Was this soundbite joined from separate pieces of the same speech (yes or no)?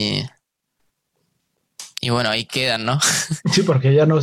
no